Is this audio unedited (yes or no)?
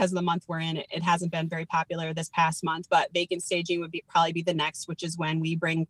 yes